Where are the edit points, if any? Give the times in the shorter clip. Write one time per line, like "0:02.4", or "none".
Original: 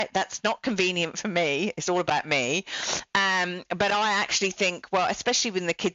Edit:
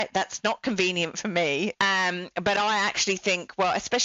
0:01.7